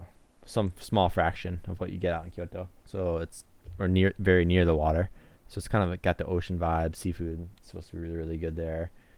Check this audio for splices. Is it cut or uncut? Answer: cut